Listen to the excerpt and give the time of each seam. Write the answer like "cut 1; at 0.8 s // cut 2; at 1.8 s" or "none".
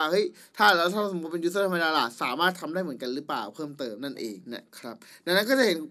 cut 1; at 4.4 s